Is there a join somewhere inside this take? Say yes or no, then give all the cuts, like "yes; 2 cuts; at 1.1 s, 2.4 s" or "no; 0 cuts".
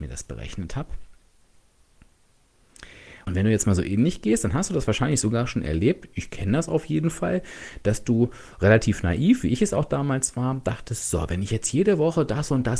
yes; 1 cut; at 3.2 s